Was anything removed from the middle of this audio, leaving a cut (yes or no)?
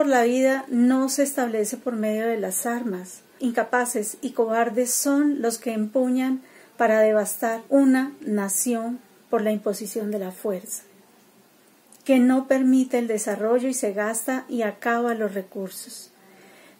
yes